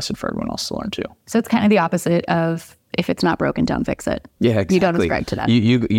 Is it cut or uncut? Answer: uncut